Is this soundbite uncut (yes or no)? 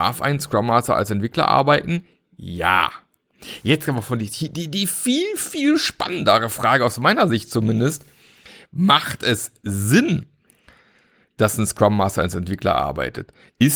yes